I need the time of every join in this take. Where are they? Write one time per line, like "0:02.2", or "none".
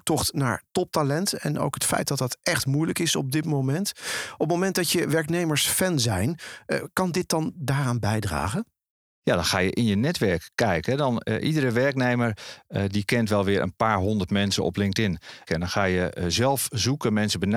0:15.5